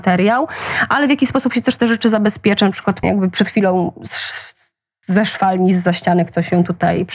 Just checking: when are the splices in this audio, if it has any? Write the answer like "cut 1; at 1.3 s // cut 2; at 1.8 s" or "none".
cut 1; at 3.0 s